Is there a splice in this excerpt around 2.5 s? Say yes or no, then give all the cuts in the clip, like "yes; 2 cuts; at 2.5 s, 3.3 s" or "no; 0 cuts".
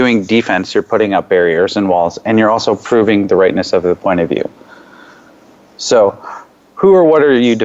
no; 0 cuts